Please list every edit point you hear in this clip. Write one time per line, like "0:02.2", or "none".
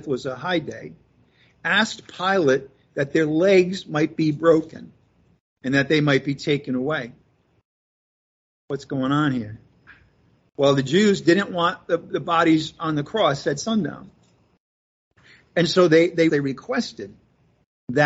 0:16.3